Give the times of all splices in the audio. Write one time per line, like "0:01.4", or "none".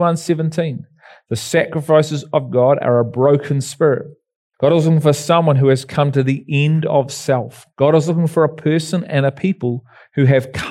0:04.5
0:07.7